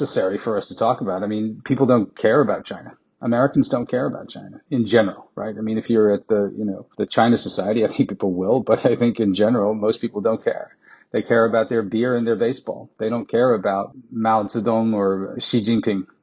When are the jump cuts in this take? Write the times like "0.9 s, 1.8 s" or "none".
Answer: none